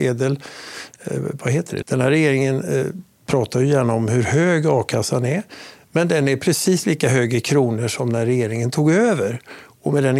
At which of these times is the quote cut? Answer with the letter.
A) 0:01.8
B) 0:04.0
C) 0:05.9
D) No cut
A